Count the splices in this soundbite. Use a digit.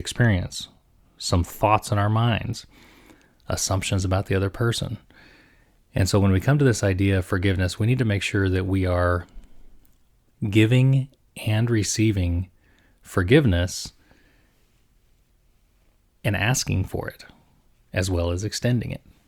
0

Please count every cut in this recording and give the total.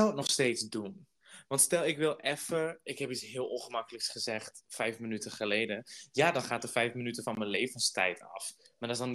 0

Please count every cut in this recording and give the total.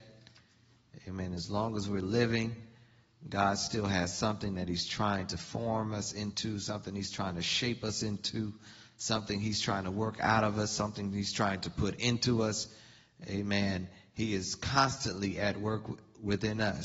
0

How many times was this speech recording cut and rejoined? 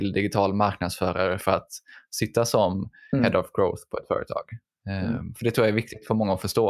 0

